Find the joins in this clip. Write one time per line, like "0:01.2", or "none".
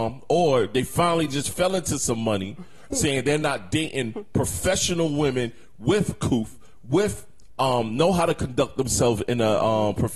none